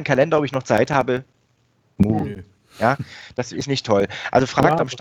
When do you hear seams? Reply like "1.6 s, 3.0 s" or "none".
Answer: none